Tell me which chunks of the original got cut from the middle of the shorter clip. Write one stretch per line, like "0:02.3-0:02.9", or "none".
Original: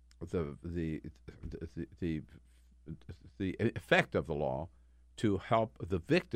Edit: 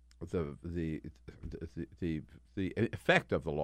0:02.5-0:03.3